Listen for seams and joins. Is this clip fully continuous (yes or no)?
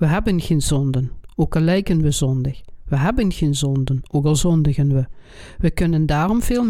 yes